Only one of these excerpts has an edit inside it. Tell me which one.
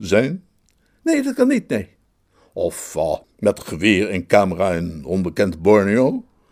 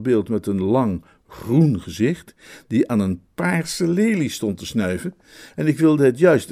first; 1 cut; at 3.2 s

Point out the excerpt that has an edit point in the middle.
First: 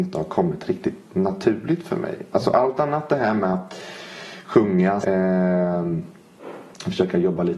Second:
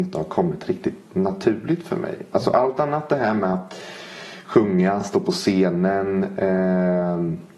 first; 1 cut; at 5.0 s

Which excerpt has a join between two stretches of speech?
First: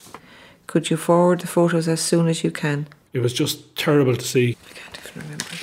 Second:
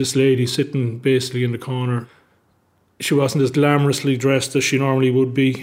first; 2 cuts; at 3.1 s, 4.5 s

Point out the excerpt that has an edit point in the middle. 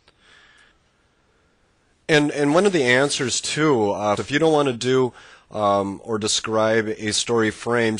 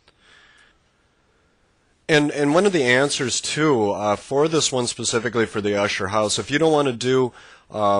first; 1 cut; at 4.2 s

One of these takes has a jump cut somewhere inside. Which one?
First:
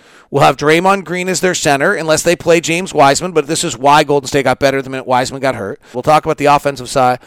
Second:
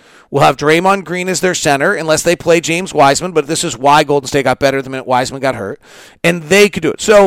first; 1 cut; at 5.9 s

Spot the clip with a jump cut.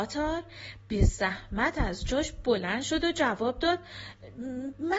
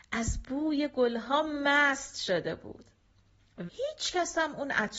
second; 1 cut; at 3.7 s

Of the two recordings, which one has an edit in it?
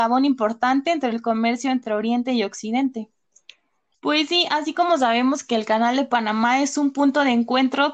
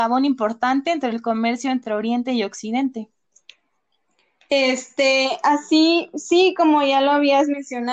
first; 1 cut; at 3.9 s

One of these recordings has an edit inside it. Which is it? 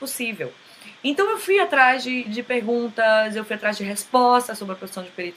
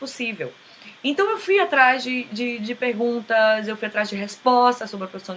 first; 1 cut; at 2.3 s

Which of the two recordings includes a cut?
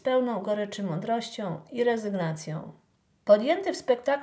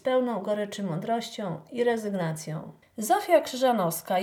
second; 1 cut; at 2.8 s

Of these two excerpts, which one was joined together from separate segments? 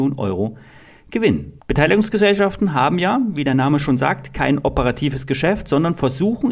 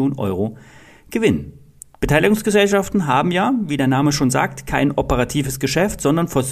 first; 1 cut; at 1.6 s

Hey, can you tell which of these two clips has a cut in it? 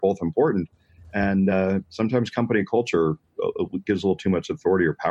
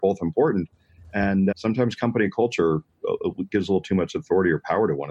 second; 1 cut; at 1.5 s

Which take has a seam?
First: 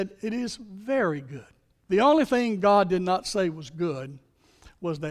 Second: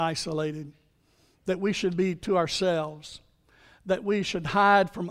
first; 1 cut; at 1.8 s

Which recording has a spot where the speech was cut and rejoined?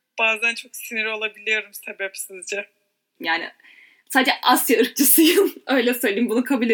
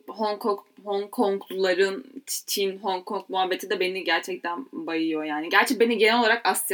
first; 1 cut; at 3.2 s

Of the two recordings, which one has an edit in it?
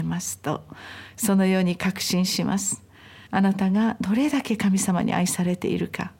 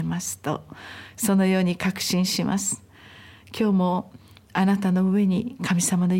first; 1 cut; at 3.3 s

